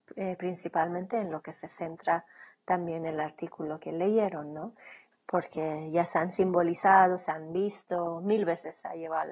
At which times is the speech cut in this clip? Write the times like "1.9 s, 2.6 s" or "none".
5.1 s